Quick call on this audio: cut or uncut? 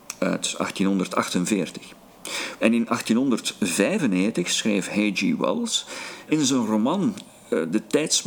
cut